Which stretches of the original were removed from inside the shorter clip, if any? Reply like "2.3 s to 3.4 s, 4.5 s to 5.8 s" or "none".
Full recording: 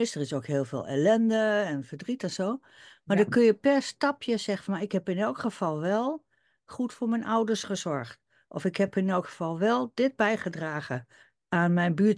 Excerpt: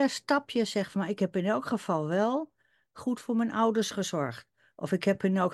none